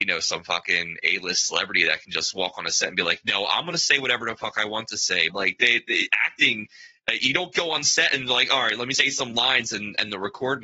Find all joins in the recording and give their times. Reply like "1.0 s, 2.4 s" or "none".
5.3 s, 8.9 s